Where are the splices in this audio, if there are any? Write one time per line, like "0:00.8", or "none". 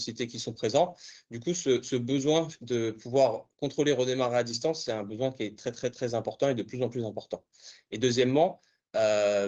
none